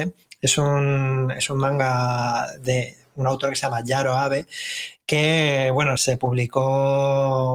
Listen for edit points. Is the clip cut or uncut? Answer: cut